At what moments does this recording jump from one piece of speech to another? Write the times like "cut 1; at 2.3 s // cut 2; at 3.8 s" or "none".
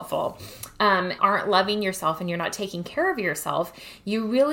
cut 1; at 1.2 s